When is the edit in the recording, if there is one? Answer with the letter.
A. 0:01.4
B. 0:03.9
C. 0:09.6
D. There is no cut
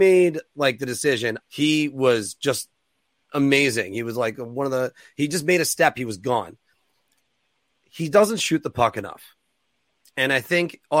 A